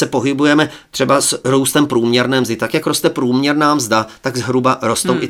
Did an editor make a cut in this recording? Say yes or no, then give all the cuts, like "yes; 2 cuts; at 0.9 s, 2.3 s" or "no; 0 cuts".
no; 0 cuts